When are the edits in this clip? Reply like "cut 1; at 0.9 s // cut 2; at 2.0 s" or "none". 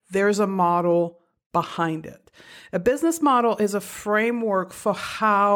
none